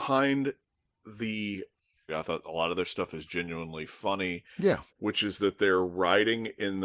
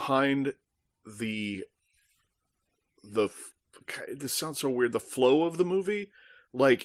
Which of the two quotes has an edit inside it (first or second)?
first